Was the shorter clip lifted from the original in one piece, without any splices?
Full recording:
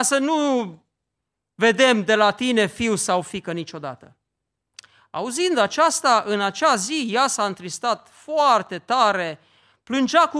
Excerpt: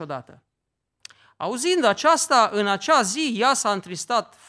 yes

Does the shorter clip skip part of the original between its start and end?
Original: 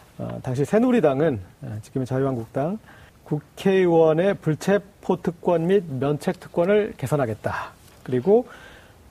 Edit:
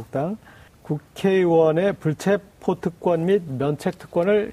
no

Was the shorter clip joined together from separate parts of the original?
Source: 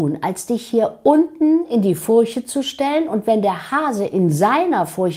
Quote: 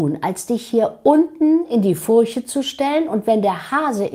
no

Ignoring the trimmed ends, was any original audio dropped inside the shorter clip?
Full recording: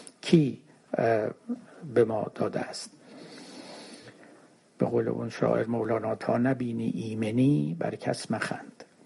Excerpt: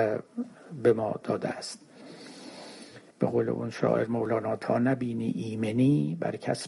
yes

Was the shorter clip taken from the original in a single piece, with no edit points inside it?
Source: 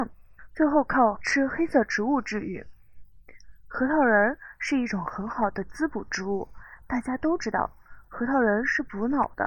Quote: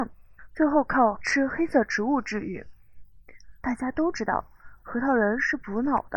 no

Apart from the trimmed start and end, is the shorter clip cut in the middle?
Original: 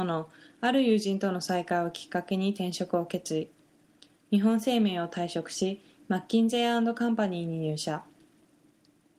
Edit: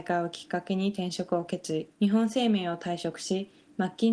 yes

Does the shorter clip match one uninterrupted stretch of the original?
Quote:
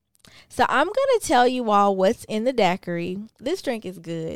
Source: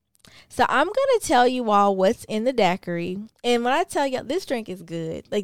no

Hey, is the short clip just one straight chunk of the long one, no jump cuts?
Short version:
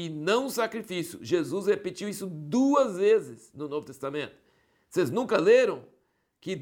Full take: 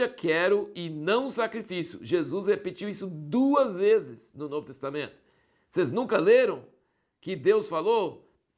yes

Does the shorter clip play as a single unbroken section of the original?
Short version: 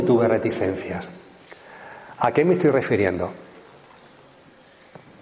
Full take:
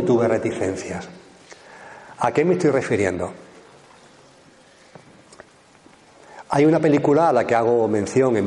yes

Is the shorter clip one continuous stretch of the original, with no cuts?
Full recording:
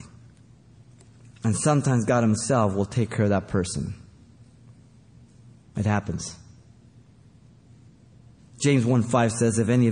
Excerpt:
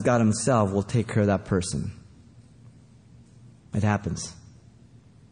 yes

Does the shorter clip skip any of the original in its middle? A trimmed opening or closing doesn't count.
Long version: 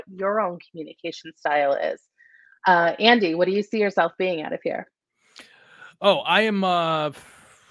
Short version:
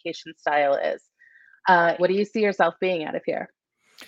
yes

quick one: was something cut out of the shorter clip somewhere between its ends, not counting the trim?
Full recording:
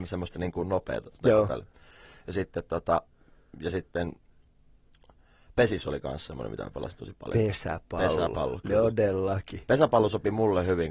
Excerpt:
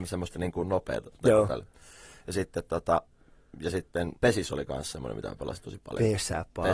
yes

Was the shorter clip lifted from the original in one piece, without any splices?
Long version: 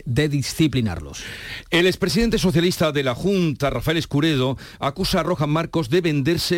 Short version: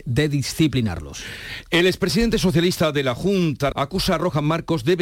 no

